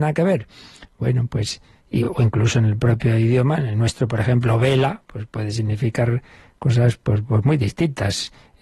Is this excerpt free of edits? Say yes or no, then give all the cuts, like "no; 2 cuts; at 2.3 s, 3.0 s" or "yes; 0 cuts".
yes; 0 cuts